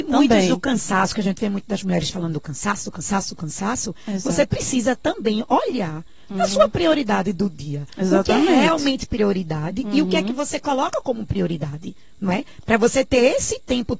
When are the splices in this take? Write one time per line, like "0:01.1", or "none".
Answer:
none